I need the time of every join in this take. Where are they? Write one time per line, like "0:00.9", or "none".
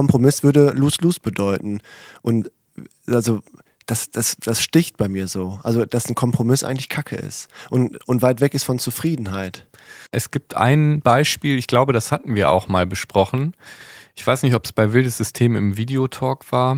0:10.1